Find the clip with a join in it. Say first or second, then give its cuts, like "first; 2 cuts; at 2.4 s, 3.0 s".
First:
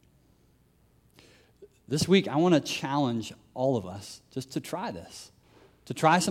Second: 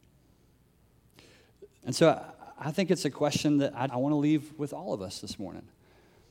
second; 2 cuts; at 1.8 s, 3.9 s